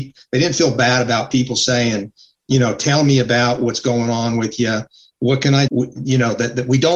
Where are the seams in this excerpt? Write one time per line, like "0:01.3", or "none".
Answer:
0:05.7

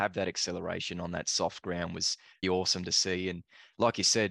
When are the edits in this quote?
0:02.4

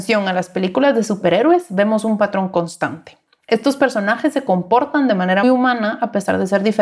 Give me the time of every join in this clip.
0:05.4

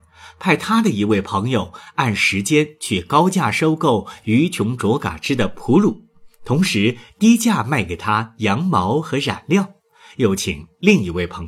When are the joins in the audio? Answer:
none

